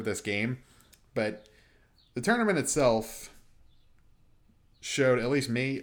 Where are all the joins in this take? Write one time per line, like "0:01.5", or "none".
none